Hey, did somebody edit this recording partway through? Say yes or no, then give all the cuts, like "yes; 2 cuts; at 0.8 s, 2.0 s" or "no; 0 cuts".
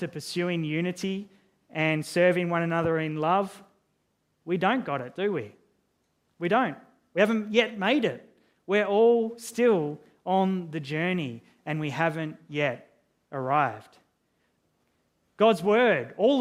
no; 0 cuts